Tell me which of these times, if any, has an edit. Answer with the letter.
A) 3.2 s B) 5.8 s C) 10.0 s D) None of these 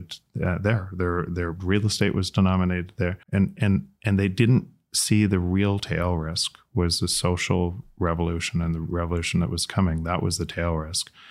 A